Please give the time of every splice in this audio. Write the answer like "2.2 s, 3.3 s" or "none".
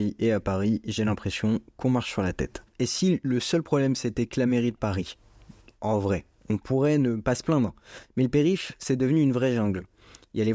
none